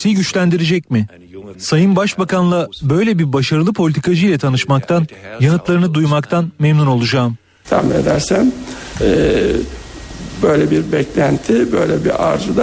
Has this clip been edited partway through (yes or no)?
yes